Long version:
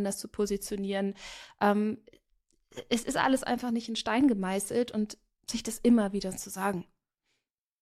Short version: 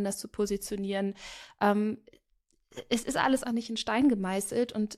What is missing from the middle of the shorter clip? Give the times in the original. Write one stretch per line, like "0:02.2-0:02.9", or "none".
0:03.4-0:03.6